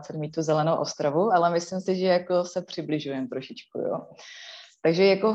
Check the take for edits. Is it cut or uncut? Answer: uncut